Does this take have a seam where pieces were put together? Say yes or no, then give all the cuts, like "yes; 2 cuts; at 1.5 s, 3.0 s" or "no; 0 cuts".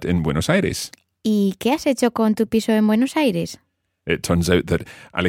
no; 0 cuts